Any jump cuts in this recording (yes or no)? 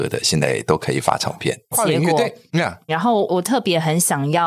yes